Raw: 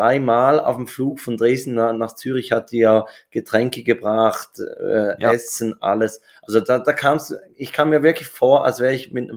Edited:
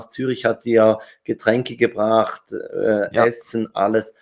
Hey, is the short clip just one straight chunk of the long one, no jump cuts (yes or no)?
yes